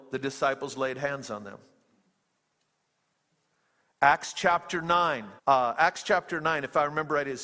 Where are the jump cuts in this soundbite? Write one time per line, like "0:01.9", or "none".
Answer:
0:05.4